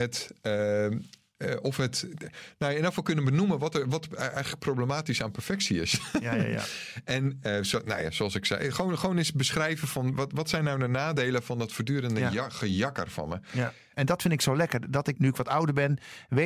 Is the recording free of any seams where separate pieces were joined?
no; 2 cuts; at 13.9 s, 15.1 s

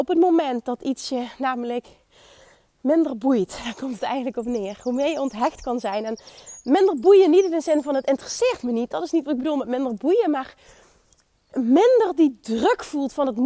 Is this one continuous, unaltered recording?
yes; 0 cuts

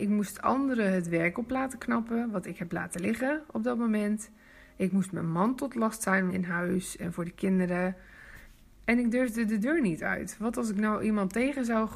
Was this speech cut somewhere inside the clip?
yes; 1 cut; at 6.3 s

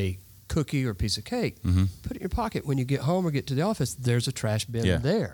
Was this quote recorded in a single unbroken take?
yes; 0 cuts

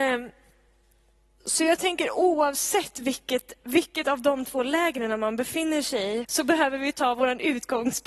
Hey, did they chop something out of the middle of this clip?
yes; 1 cut; at 6.2 s

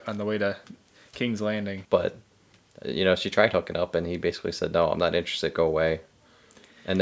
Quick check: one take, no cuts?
no; 1 cut; at 1.8 s

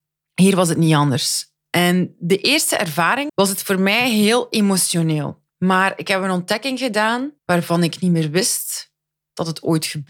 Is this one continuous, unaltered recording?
no; 3 cuts; at 3.3 s, 5.5 s, 7.4 s

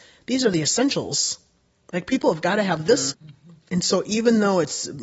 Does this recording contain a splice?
yes; 1 cut; at 3.1 s

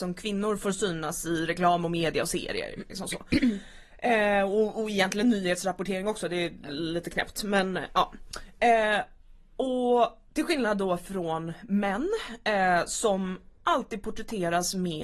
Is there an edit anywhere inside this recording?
no; 0 cuts

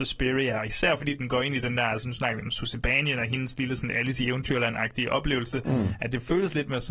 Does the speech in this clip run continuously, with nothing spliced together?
yes; 0 cuts

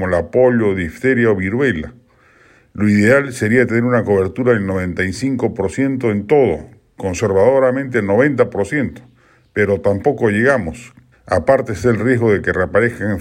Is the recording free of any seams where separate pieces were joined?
no; 1 cut; at 11.1 s

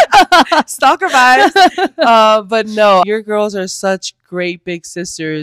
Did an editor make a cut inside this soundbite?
yes; 1 cut; at 3.0 s

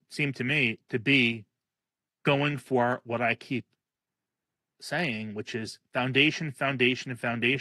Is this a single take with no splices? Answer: yes; 0 cuts

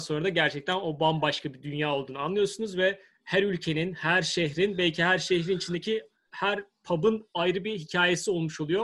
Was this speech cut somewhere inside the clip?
no; 0 cuts

